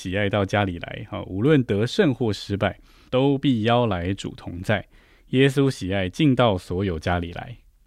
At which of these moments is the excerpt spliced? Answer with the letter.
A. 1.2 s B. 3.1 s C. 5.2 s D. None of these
B